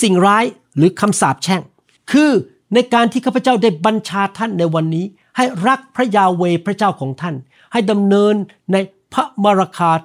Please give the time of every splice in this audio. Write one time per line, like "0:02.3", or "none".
none